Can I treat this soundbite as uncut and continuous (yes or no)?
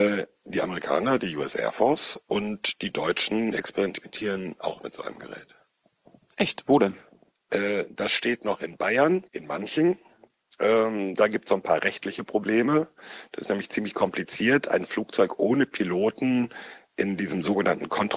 no